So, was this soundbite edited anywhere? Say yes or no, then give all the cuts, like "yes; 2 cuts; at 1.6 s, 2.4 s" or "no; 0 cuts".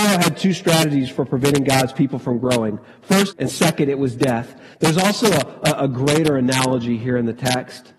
yes; 2 cuts; at 3.3 s, 4.7 s